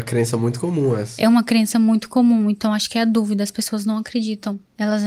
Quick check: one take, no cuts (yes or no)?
yes